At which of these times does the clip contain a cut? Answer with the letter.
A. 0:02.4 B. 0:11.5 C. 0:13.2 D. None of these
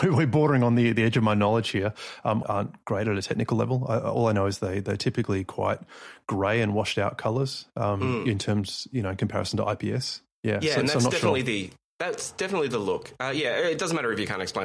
A